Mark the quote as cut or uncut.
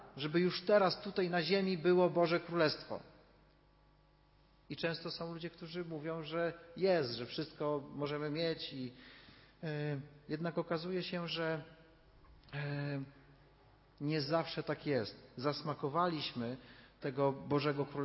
uncut